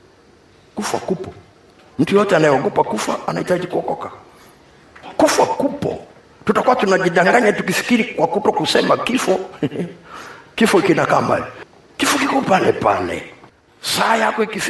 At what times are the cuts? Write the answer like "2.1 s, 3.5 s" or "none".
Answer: 5.0 s